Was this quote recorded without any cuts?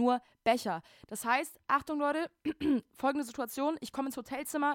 yes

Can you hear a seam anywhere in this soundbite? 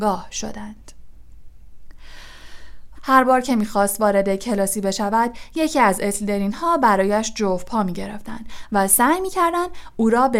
yes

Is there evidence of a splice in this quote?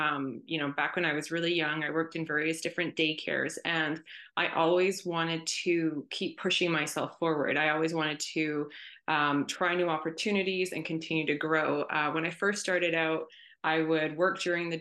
no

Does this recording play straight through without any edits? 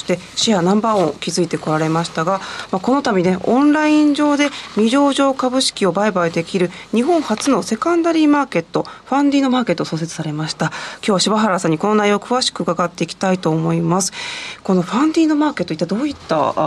yes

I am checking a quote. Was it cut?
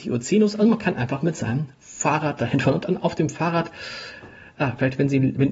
no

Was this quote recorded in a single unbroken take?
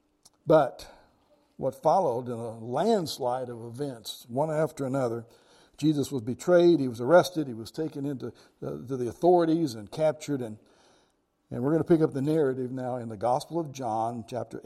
yes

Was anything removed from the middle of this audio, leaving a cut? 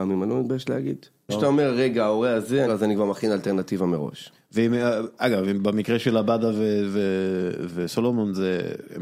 yes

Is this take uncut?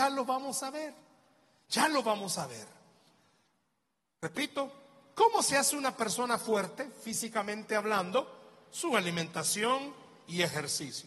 yes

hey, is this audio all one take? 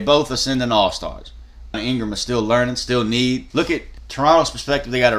no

